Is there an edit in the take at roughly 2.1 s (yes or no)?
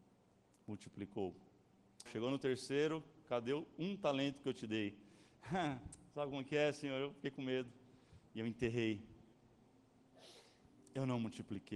yes